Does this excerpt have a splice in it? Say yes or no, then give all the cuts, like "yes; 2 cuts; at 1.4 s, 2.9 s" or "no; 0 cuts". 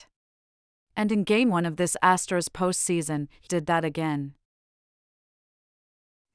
yes; 1 cut; at 3.5 s